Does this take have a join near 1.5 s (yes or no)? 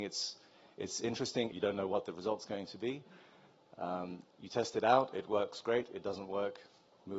yes